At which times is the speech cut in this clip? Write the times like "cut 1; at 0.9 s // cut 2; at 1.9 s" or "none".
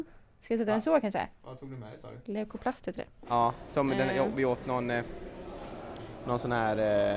cut 1; at 2.2 s // cut 2; at 3.3 s